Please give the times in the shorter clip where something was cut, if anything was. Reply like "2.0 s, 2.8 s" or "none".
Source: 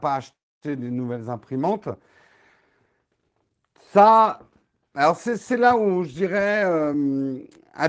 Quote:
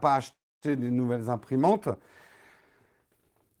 none